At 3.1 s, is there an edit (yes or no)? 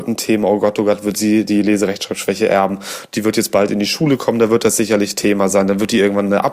no